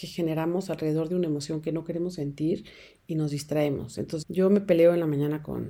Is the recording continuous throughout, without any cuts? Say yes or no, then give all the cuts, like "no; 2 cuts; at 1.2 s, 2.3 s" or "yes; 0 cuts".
no; 1 cut; at 4.2 s